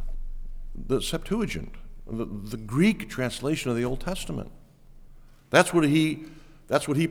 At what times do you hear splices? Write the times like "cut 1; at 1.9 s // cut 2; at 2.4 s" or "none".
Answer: none